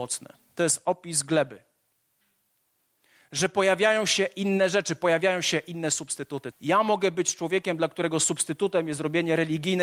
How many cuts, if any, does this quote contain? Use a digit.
1